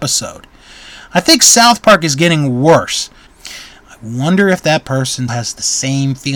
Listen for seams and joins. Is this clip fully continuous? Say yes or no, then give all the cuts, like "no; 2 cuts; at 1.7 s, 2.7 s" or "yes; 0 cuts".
no; 2 cuts; at 3.3 s, 5.3 s